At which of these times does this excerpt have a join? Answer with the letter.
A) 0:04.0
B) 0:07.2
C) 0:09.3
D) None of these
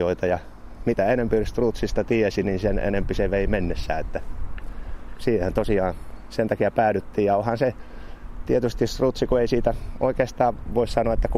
D